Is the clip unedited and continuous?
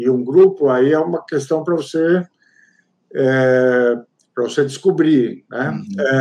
yes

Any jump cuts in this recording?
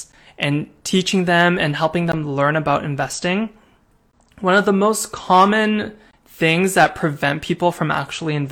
no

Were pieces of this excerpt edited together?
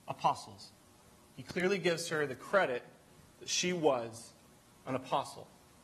no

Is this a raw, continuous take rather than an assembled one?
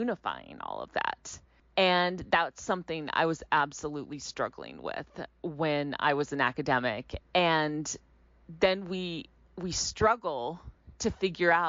no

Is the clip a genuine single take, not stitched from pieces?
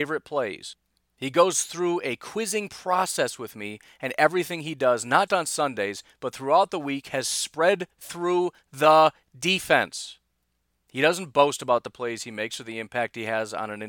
no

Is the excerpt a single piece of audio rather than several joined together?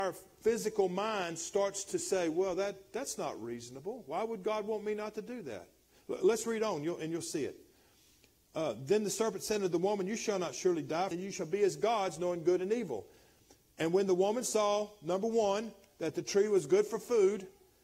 no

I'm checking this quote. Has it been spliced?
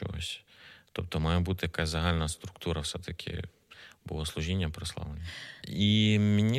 yes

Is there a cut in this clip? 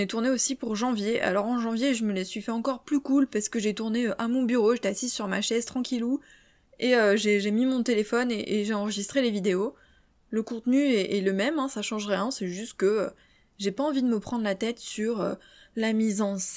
no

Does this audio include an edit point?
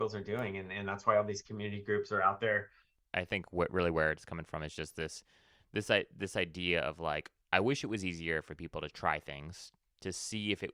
no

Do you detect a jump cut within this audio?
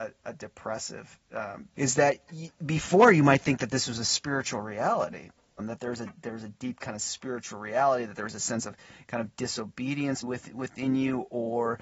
yes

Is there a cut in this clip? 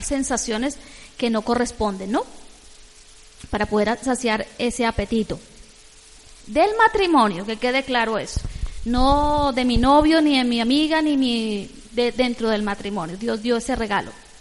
yes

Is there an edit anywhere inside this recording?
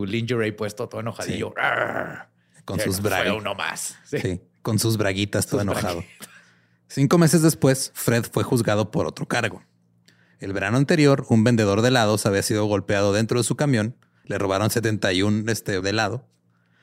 yes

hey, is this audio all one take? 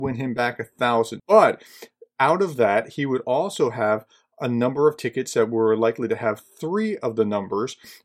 no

